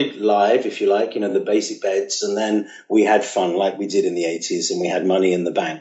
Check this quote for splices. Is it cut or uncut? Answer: uncut